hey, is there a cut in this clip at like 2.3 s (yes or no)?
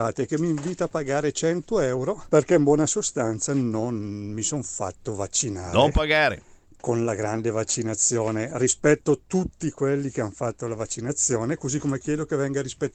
yes